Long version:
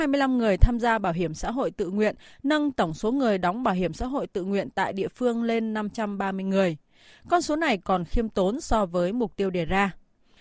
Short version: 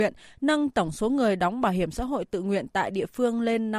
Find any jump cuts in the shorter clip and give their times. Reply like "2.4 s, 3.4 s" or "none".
none